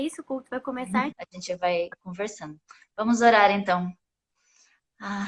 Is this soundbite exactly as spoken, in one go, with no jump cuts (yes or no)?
no